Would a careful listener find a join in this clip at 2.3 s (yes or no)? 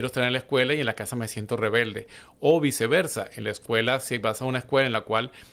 no